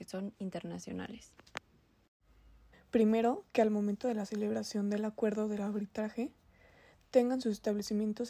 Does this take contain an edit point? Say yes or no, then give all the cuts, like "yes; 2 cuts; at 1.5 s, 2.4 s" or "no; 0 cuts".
yes; 1 cut; at 2.7 s